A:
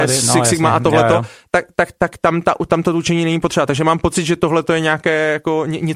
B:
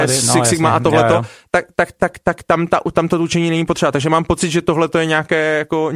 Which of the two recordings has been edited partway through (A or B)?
A